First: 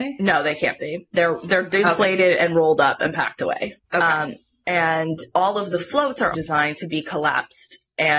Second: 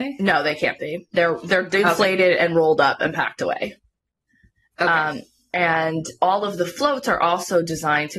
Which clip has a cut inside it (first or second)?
first